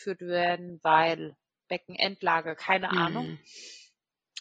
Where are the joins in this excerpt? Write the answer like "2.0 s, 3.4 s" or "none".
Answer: none